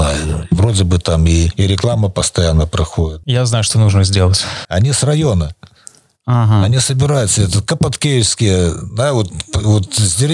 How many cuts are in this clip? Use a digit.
1